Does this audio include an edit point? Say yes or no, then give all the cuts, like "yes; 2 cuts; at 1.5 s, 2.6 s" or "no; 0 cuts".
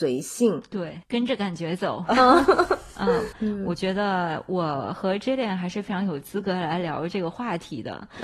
yes; 2 cuts; at 2.1 s, 3.3 s